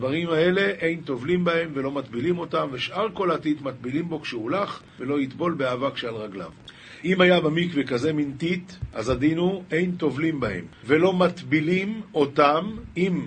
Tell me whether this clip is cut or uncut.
uncut